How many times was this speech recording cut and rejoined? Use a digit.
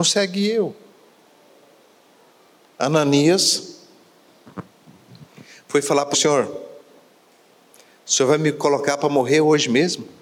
1